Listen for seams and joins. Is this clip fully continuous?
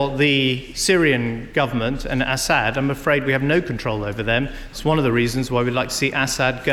yes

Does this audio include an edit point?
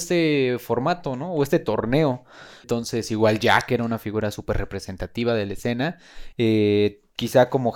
yes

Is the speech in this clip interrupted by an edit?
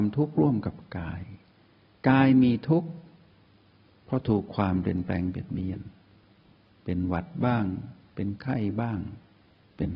no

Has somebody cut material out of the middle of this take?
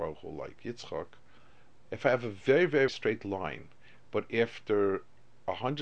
yes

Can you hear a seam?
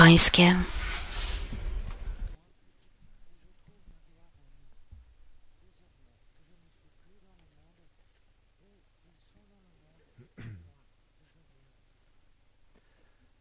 no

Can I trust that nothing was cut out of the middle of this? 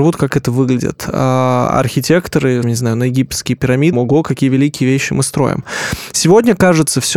no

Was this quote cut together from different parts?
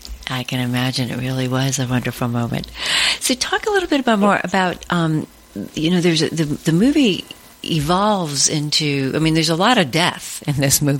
no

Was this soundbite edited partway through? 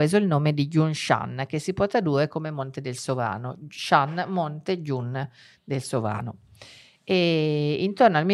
no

